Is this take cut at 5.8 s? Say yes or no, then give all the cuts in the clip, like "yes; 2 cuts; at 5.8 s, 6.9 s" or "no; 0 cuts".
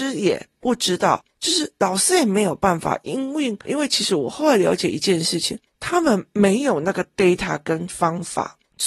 no; 1 cut; at 3.7 s